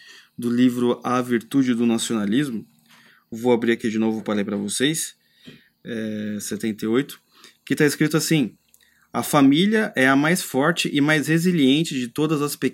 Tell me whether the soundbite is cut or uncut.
uncut